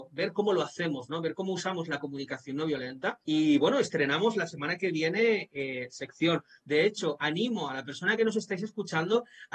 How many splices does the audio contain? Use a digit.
2